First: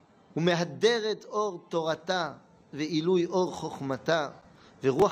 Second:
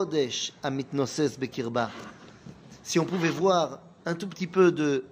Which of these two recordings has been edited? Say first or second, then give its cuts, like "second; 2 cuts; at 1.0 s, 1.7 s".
second; 1 cut; at 4.0 s